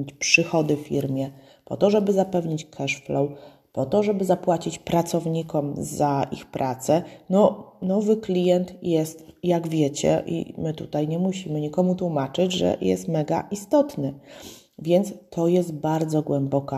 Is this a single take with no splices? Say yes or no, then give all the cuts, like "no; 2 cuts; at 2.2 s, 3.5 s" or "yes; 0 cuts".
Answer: yes; 0 cuts